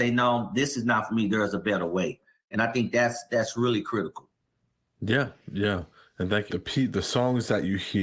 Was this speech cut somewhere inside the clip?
yes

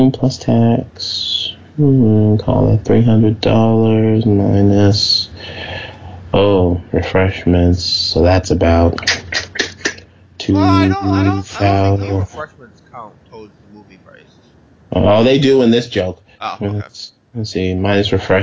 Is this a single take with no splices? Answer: yes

